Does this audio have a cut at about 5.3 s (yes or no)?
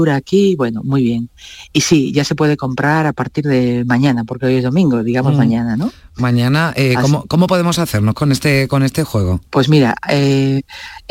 no